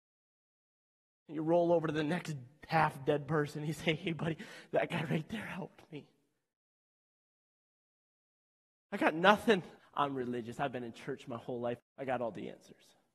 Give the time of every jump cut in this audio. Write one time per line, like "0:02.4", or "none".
0:09.8
0:11.8